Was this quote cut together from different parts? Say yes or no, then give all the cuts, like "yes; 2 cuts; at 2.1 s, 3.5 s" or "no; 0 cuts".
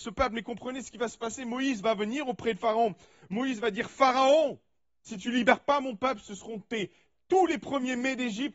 no; 0 cuts